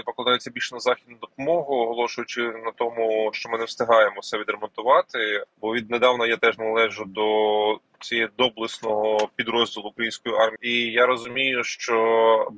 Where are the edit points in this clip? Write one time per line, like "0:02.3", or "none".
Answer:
0:03.3
0:05.5
0:10.6